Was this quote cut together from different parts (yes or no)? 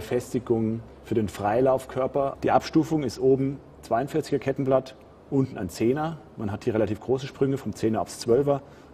yes